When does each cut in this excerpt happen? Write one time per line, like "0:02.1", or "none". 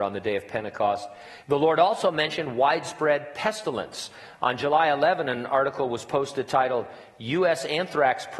0:01.4